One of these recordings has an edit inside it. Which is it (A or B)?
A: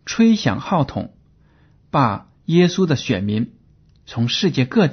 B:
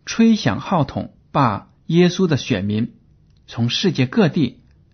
B